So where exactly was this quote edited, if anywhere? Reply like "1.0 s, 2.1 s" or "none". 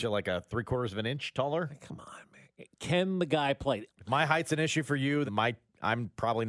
3.9 s, 5.3 s